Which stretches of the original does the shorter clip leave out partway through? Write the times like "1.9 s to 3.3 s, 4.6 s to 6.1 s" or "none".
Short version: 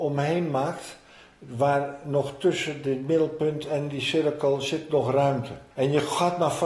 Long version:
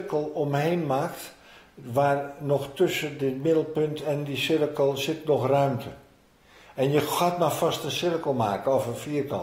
6.1 s to 6.7 s